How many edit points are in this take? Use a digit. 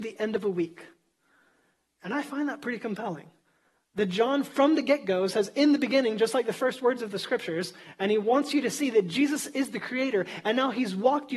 0